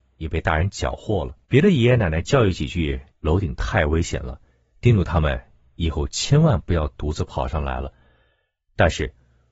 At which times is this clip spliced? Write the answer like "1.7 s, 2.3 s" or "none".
1.4 s, 3.1 s